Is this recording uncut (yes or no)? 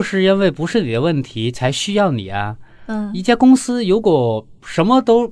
yes